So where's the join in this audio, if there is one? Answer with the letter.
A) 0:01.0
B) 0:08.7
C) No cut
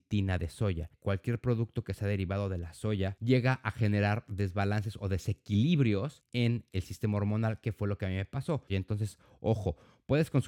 B